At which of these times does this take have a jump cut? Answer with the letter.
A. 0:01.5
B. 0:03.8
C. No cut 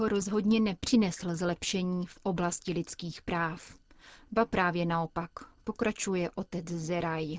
C